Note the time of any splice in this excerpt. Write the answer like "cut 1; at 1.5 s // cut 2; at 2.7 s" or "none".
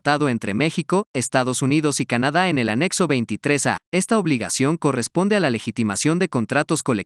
cut 1; at 3.8 s